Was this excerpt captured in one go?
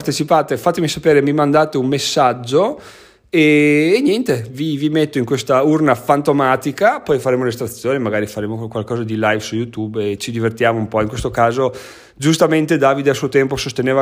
yes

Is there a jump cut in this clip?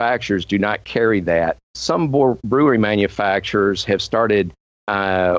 yes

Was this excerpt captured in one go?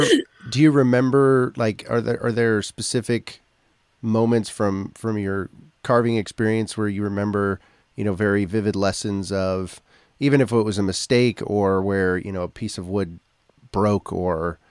yes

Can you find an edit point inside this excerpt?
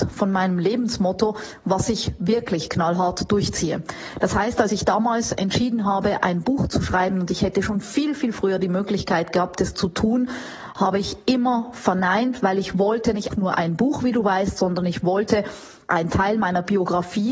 yes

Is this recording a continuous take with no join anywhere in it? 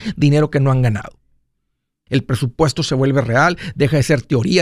no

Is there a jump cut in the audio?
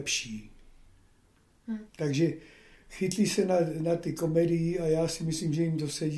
yes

